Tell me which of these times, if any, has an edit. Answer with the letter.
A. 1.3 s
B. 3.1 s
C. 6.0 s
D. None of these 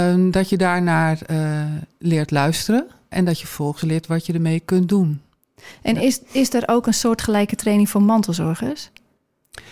B